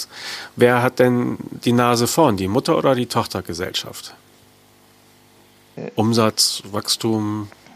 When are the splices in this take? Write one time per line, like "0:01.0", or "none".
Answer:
0:05.9